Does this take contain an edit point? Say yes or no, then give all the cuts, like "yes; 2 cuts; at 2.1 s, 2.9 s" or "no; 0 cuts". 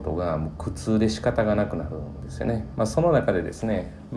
yes; 1 cut; at 2.7 s